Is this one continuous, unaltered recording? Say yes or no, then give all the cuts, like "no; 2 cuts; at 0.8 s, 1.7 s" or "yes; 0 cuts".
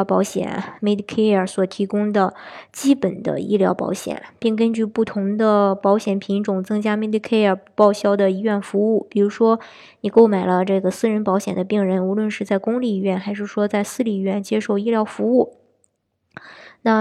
yes; 0 cuts